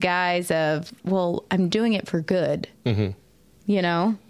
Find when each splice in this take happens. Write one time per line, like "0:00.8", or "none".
none

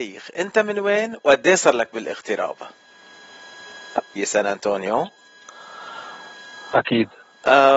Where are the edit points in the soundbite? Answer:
0:04.2

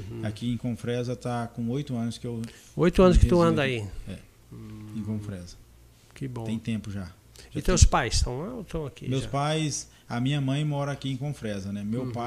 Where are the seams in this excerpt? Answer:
none

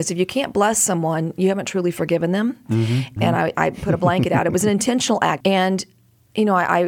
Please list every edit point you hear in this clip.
0:03.2
0:05.4

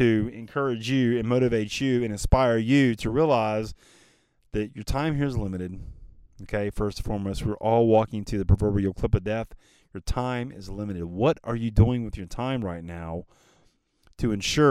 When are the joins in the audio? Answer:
none

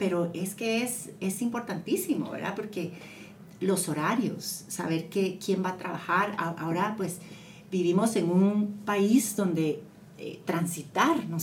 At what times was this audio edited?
none

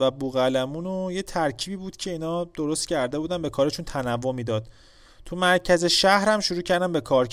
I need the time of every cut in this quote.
none

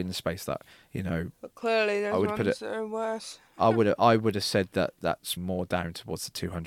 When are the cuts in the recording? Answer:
0:05.4

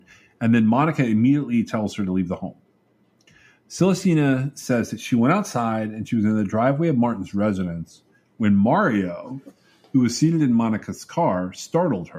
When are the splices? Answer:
none

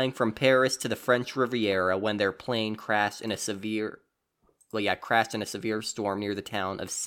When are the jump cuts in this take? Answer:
none

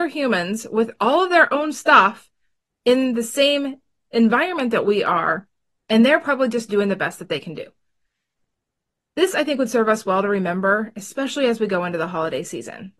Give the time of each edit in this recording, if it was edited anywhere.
none

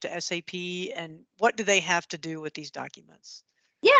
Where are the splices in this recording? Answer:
none

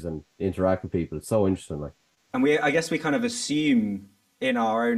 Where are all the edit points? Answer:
0:02.3

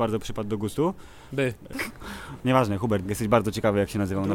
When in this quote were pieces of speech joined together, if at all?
0:01.7
0:03.0

